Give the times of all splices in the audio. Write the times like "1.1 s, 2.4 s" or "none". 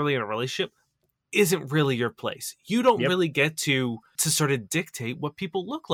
none